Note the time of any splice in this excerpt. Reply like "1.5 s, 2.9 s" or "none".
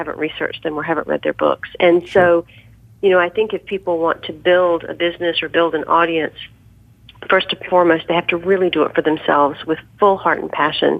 none